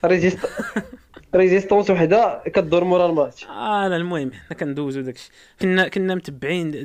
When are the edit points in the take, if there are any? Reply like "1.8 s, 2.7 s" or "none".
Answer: 5.6 s